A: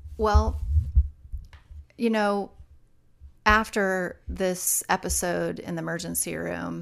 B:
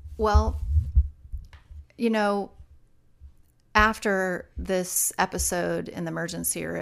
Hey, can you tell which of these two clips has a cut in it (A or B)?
A